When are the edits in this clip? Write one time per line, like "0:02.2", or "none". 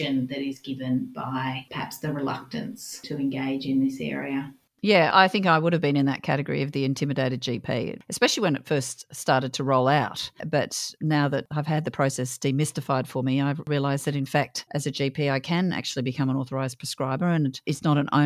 none